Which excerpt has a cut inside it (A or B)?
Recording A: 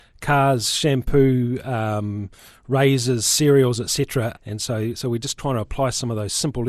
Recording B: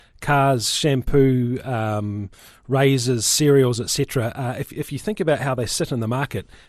A